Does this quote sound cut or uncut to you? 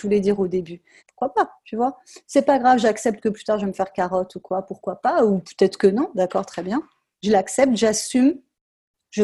cut